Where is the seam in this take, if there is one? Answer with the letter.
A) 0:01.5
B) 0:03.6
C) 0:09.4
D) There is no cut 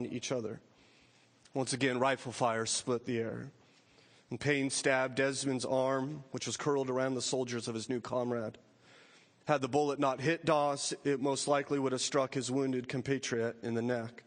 C